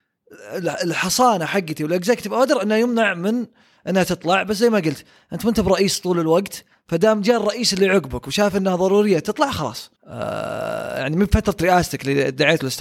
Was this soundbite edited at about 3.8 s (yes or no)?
no